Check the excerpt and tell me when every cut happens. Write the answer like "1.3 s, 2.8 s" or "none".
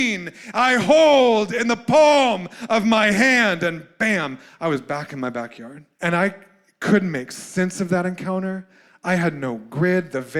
5.9 s